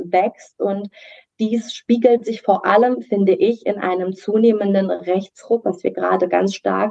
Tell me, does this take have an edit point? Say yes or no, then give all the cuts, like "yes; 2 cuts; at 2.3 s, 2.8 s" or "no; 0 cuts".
no; 0 cuts